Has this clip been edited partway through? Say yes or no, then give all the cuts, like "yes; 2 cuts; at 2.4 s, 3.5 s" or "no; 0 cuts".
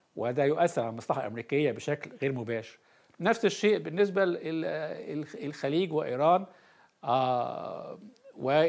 no; 0 cuts